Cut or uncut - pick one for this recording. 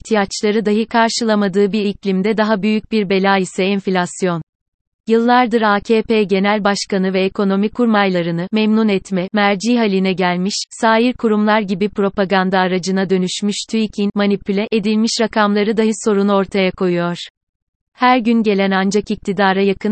uncut